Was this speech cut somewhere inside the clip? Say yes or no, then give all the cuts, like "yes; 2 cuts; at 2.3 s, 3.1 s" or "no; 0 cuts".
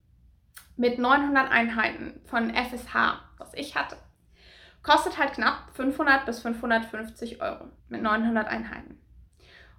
yes; 2 cuts; at 3.4 s, 7.8 s